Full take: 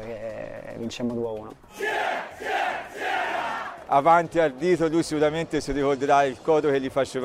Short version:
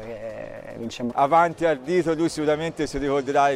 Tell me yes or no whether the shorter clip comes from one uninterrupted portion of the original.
no